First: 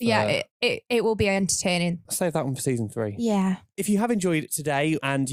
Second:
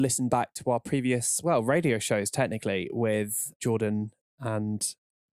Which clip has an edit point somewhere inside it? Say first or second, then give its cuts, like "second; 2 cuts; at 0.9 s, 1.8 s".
first; 1 cut; at 2.1 s